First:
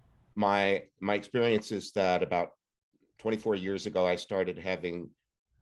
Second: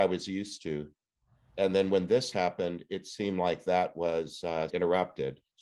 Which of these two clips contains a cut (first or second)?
second